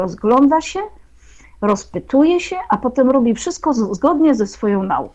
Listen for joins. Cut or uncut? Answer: uncut